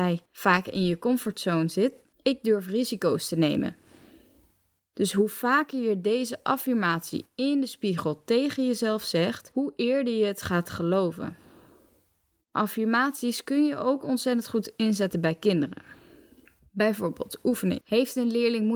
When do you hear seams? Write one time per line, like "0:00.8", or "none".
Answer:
none